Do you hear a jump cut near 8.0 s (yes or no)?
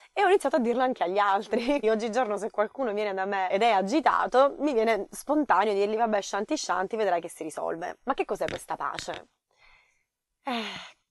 no